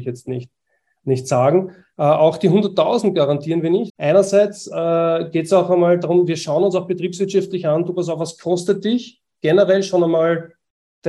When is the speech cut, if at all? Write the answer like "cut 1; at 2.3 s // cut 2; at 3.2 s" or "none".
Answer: cut 1; at 1.9 s // cut 2; at 3.9 s